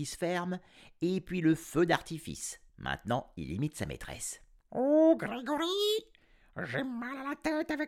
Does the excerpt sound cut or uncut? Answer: uncut